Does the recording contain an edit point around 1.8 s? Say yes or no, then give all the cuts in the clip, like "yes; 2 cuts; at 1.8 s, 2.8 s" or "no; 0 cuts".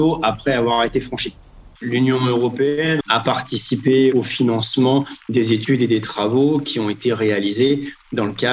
yes; 2 cuts; at 1.8 s, 3.0 s